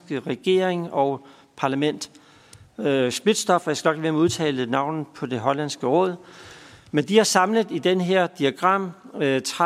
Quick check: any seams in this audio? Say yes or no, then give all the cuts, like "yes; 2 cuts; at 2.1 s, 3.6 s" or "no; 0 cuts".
no; 0 cuts